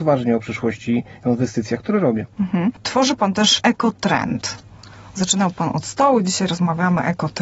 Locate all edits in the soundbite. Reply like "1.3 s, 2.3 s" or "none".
2.3 s